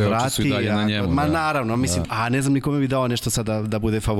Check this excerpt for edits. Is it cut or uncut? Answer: cut